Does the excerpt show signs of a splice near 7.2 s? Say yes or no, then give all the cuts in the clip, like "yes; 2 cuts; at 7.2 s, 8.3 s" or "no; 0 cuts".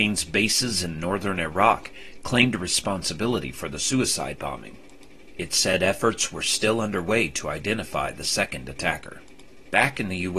no; 1 cut; at 5.3 s